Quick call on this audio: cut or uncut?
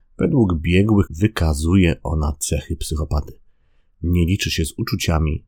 cut